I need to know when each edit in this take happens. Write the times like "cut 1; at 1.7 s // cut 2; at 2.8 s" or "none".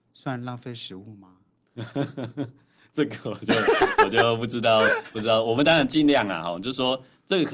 none